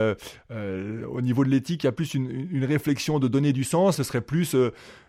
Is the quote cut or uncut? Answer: cut